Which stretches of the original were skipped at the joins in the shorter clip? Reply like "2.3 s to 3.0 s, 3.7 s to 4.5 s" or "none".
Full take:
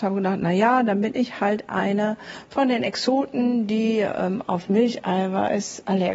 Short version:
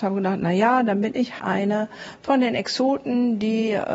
1.4 s to 1.7 s